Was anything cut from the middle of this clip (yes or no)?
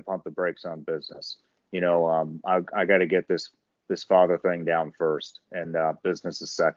no